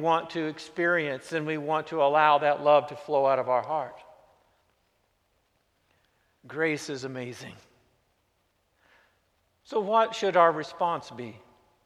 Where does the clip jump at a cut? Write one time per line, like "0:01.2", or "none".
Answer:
none